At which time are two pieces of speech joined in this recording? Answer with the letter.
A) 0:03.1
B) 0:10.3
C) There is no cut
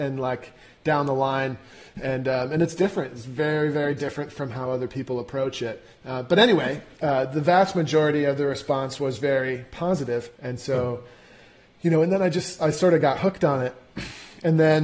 B